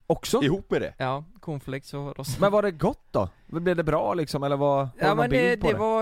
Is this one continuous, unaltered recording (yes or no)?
yes